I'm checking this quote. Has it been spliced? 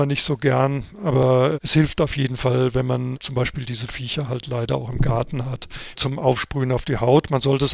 yes; 1 cut; at 5.9 s

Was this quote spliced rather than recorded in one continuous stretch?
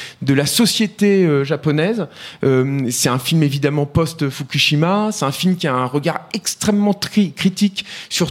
no; 0 cuts

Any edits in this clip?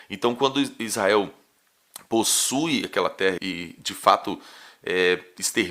yes; 1 cut; at 3.4 s

